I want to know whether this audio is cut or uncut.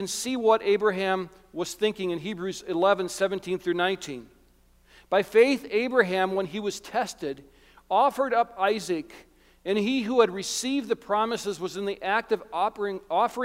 uncut